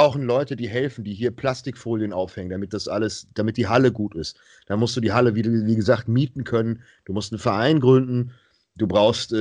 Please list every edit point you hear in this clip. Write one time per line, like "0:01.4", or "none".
none